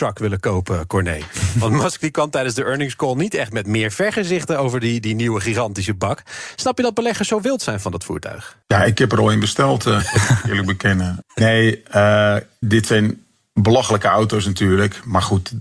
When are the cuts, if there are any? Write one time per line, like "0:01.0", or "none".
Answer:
0:11.2
0:12.6